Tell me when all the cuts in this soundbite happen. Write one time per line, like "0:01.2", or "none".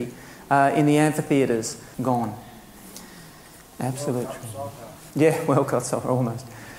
0:01.9
0:05.1